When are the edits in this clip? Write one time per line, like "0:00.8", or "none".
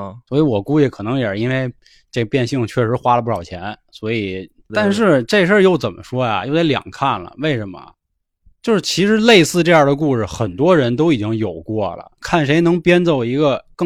0:04.7
0:12.2

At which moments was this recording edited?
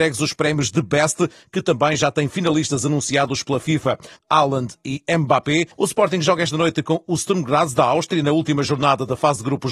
0:04.2
0:05.7

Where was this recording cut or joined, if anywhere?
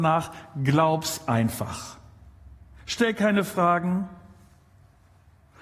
none

